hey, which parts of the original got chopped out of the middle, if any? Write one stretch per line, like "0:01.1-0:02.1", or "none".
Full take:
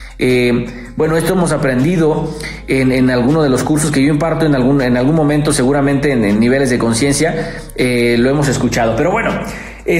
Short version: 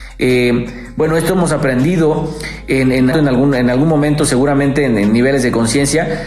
0:03.1-0:04.4